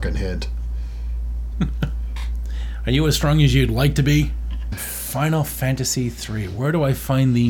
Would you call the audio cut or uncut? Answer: cut